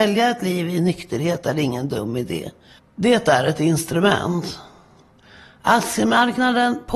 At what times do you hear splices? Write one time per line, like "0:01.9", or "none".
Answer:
0:02.8